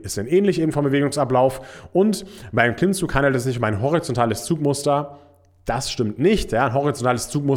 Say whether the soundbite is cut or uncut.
uncut